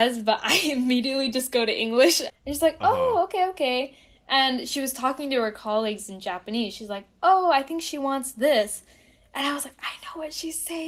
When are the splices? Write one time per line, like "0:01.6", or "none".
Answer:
0:02.3